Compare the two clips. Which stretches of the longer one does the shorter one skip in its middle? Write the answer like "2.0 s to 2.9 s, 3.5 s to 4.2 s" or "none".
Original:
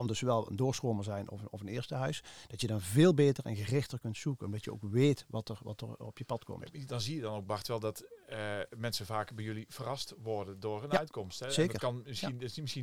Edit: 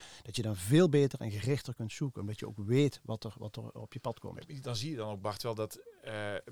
none